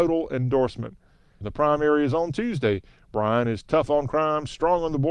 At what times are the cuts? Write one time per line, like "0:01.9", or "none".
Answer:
0:01.4